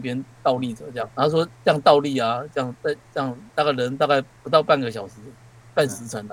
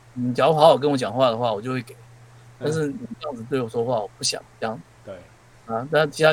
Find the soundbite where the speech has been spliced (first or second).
first